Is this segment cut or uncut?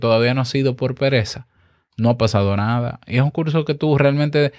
uncut